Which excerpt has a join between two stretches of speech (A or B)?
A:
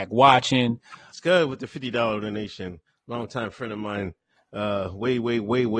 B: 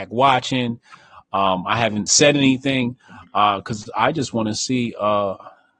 A